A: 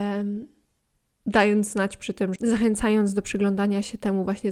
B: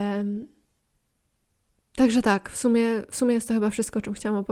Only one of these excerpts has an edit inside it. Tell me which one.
A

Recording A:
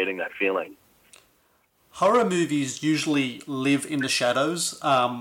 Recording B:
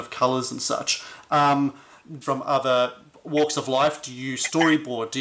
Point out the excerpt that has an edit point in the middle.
B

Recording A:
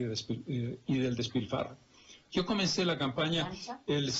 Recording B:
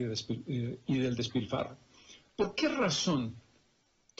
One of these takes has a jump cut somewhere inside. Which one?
A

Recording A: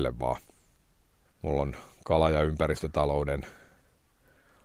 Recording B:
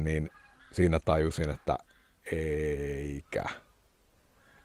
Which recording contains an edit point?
A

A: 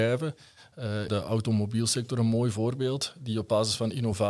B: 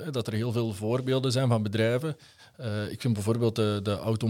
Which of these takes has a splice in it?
A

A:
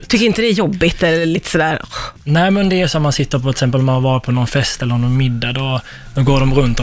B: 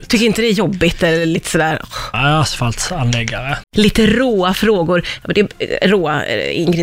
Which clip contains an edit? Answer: B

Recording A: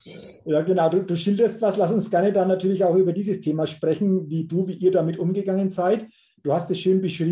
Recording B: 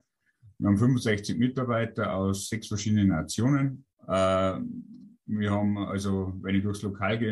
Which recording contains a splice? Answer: B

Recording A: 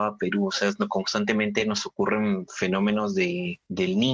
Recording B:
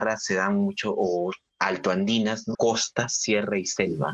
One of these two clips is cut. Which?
B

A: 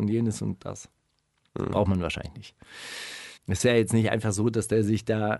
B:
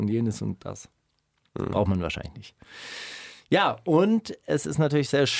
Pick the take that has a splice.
A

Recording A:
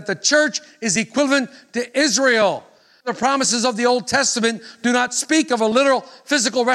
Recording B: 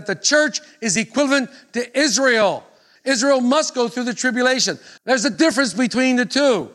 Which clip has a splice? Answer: B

